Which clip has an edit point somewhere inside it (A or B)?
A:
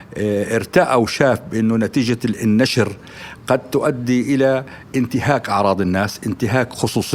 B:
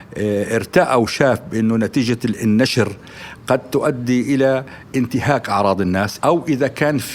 B